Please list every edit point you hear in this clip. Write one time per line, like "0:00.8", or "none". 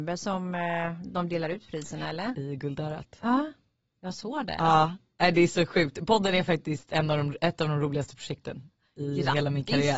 0:02.3